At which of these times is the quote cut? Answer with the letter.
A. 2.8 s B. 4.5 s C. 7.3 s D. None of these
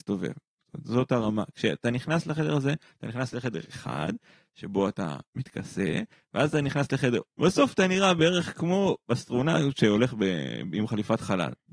C